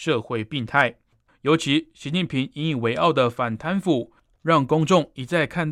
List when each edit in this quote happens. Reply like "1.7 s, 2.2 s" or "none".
1.3 s